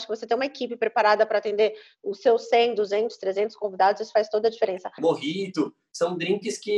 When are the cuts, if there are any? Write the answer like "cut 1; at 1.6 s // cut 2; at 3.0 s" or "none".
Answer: cut 1; at 5.0 s

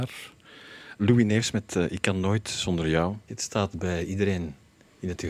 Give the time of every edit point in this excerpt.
cut 1; at 1.0 s // cut 2; at 3.3 s

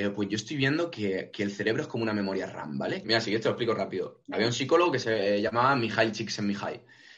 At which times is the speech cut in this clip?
cut 1; at 3.0 s

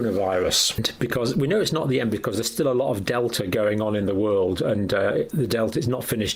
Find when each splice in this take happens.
none

